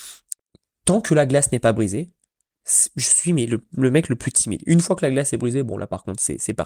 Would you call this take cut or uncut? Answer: uncut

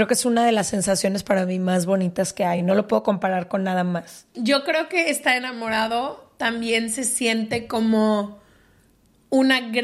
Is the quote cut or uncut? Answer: uncut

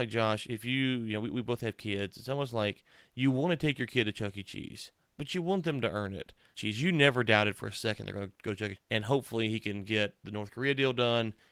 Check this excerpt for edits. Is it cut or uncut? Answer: cut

